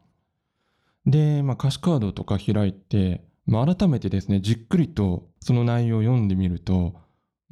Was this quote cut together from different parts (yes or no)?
no